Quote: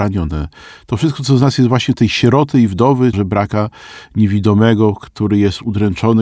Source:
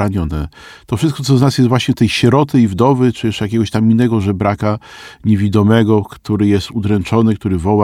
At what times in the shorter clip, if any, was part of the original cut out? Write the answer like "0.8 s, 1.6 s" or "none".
3.1 s